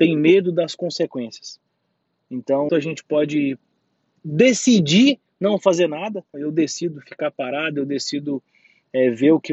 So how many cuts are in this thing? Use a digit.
2